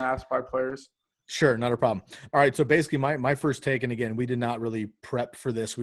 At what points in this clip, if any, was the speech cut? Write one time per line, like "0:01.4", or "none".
none